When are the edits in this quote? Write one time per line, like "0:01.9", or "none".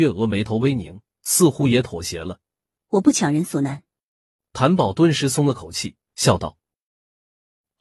0:02.7